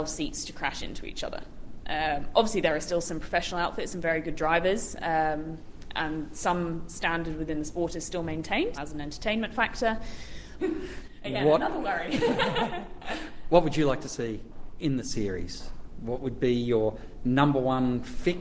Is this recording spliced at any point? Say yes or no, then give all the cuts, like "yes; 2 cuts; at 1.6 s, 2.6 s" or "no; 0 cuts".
yes; 2 cuts; at 8.7 s, 10.6 s